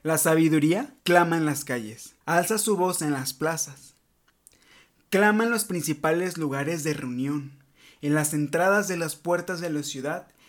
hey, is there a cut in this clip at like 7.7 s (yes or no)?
no